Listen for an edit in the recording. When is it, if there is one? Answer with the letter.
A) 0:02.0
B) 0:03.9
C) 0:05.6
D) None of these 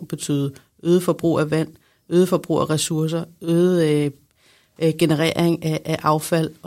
D